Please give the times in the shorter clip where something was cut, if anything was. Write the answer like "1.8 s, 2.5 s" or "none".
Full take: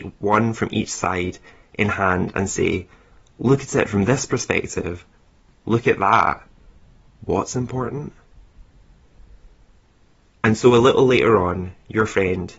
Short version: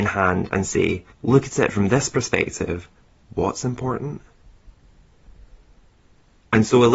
1.1 s, 3.2 s